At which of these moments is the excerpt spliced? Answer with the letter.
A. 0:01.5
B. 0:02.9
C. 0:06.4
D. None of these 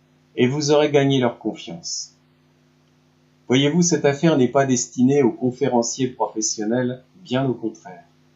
D